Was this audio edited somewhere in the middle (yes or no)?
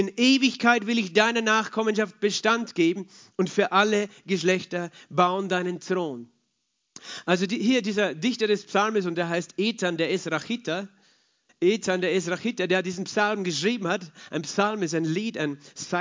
no